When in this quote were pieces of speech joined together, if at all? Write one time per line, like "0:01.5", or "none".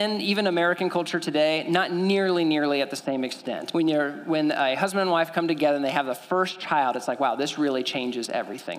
0:03.7